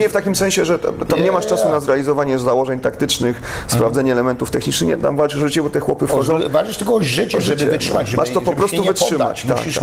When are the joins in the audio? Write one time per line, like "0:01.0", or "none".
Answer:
none